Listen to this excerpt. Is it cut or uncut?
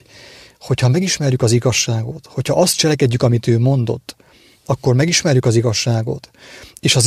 uncut